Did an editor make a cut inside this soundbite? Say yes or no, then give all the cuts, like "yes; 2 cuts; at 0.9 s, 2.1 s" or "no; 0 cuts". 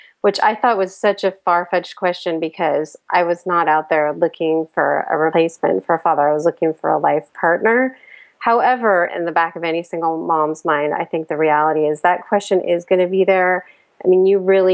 yes; 1 cut; at 9.1 s